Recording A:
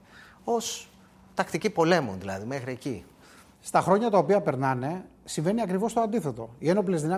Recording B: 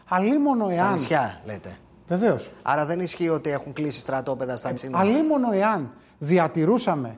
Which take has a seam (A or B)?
B